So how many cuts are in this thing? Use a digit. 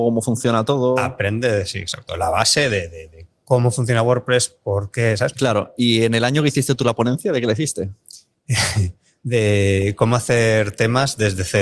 1